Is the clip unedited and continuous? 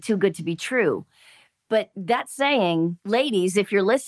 yes; 0 cuts

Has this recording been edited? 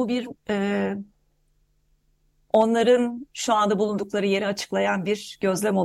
no; 0 cuts

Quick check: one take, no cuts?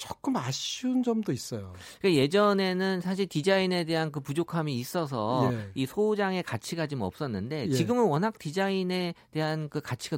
yes; 0 cuts

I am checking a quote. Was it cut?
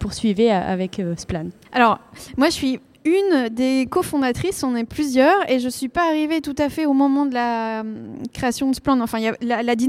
yes; 1 cut; at 1.6 s

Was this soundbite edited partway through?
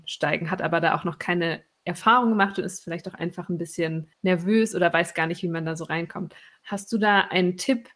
yes; 1 cut; at 4.1 s

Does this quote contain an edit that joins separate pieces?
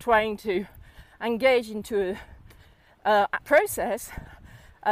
yes; 1 cut; at 3.4 s

